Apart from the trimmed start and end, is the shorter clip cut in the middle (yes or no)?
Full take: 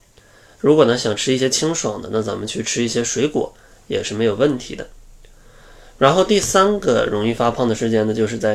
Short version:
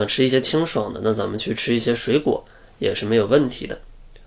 no